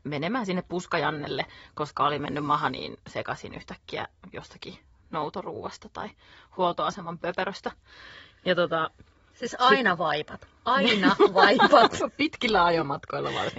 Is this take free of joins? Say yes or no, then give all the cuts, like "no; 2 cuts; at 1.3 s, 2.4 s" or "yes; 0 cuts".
yes; 0 cuts